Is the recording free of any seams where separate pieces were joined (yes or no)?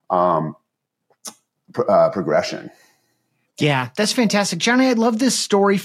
yes